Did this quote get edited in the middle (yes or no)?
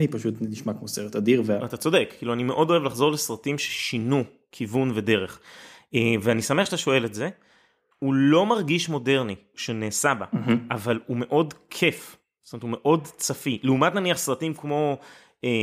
yes